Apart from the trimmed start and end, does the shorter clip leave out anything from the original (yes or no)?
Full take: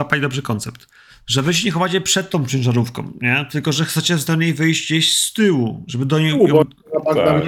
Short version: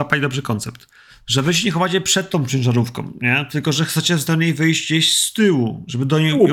no